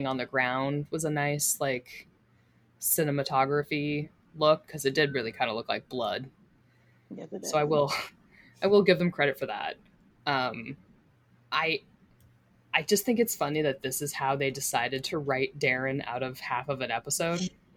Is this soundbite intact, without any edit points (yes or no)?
yes